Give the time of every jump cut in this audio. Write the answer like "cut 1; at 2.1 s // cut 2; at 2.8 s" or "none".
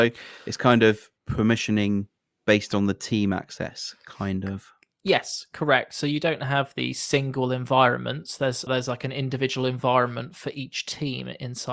cut 1; at 1.2 s // cut 2; at 8.7 s